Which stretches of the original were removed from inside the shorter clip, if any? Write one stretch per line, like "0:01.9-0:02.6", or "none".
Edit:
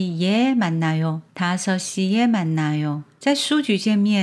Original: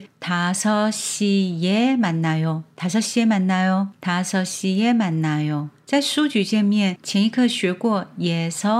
0:02.7-0:03.9